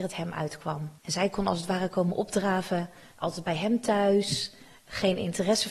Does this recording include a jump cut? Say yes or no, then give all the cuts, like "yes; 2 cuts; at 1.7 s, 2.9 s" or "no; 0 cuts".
yes; 2 cuts; at 1.0 s, 3.1 s